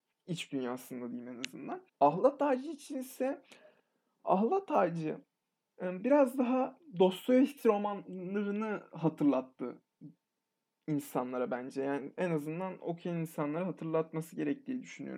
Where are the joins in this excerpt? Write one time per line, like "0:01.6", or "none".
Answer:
0:01.9